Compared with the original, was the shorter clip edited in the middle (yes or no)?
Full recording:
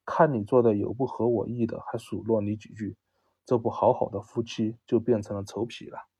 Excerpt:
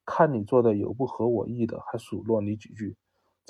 no